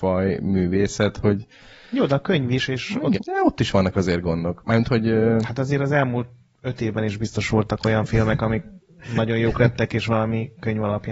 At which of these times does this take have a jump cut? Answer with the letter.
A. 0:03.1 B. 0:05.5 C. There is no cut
A